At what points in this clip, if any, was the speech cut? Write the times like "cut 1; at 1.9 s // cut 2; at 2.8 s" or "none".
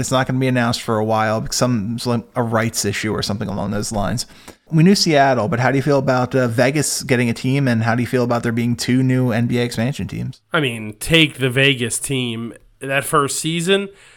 cut 1; at 4.7 s